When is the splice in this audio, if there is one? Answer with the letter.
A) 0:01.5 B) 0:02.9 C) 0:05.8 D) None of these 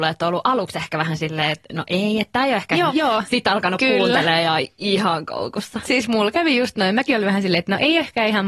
B